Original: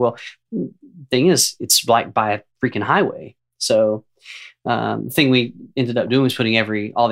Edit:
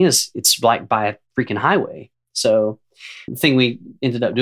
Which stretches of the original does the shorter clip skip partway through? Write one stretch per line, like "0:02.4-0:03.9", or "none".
0:04.5-0:05.0